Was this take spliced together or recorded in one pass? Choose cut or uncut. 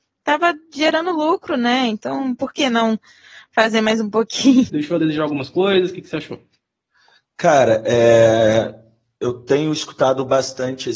cut